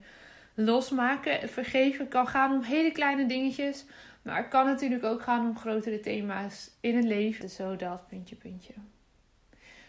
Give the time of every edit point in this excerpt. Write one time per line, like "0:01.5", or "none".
0:07.4